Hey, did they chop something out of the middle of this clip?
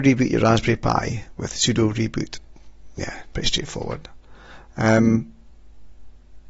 yes; 1 cut; at 3.3 s

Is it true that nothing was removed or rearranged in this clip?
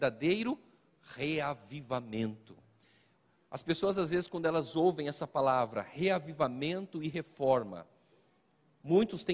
yes; 0 cuts

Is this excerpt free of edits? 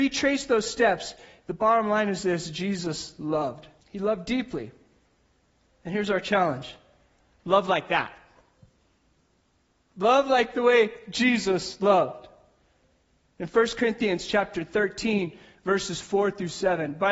no; 1 cut; at 3.8 s

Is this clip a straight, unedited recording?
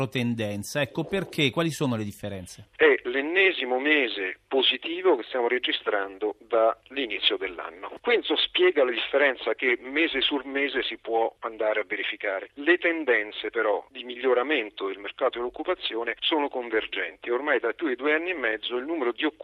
no; 2 cuts; at 2.7 s, 8.0 s

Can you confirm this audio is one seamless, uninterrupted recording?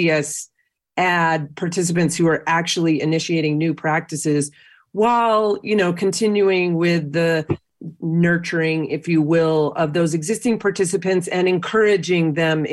yes; 0 cuts

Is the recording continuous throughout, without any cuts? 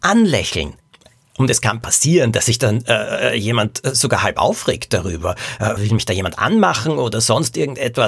no; 1 cut; at 5.8 s

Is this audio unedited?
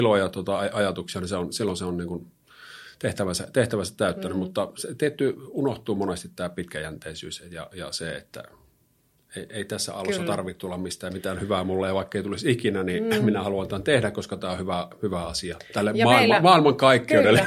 yes; 0 cuts

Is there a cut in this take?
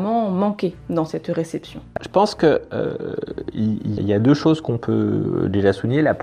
yes; 2 cuts; at 2.0 s, 4.0 s

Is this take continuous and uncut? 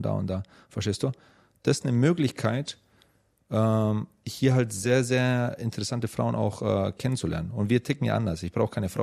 yes; 0 cuts

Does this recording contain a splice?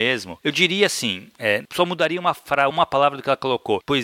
yes; 1 cut; at 2.7 s

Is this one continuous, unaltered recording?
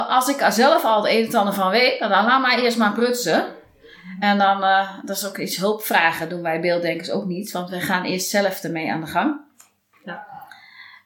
yes; 0 cuts

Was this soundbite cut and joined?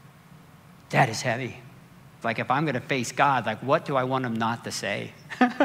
yes; 1 cut; at 2.2 s

